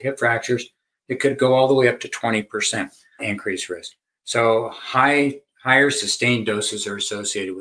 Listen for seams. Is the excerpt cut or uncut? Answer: cut